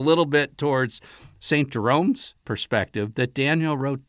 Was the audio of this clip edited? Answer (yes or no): no